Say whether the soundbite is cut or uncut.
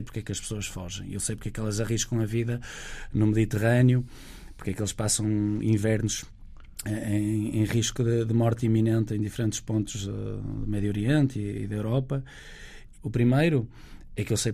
cut